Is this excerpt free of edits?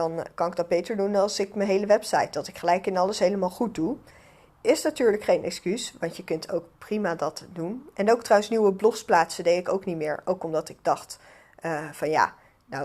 yes; 0 cuts

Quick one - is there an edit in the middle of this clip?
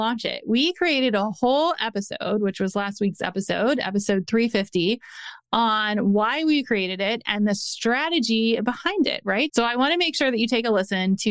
yes; 1 cut; at 9.5 s

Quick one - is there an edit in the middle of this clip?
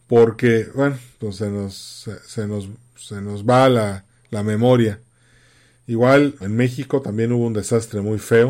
yes; 1 cut; at 6.4 s

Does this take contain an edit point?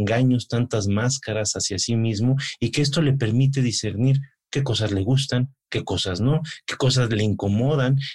no; 0 cuts

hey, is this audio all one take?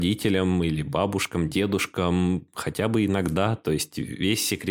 yes; 0 cuts

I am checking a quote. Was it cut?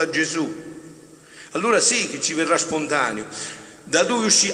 no; 0 cuts

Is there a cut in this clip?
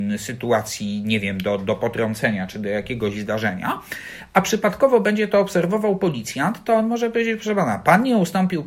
no; 0 cuts

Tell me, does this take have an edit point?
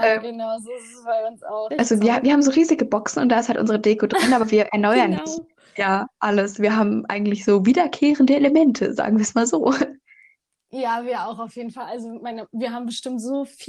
yes; 1 cut; at 1.7 s

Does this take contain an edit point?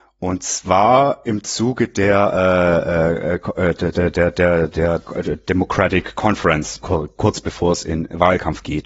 yes; 2 cuts; at 5.0 s, 6.8 s

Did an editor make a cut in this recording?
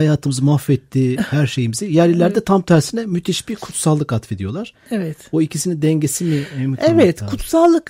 no; 0 cuts

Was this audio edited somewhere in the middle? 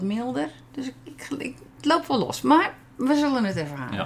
no; 0 cuts

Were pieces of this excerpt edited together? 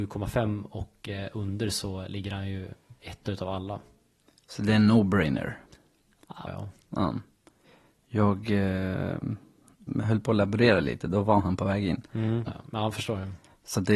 yes; 2 cuts; at 6.5 s, 12.5 s

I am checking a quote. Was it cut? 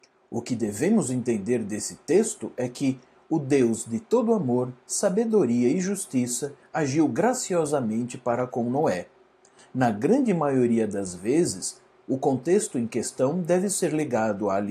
yes; 3 cuts; at 6.6 s, 9.6 s, 12.0 s

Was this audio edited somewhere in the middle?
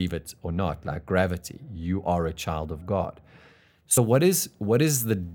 no; 0 cuts

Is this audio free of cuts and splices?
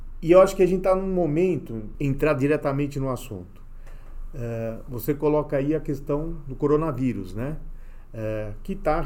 no; 1 cut; at 1.9 s

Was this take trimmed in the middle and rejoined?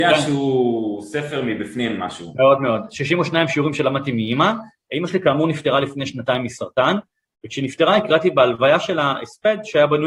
no; 0 cuts

